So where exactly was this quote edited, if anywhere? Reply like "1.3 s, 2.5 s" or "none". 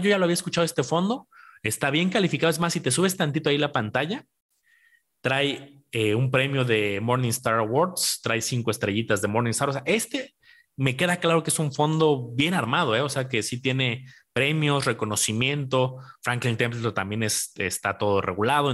none